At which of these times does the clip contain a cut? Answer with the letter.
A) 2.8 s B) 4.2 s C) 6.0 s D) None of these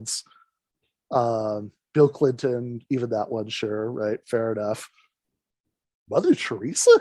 D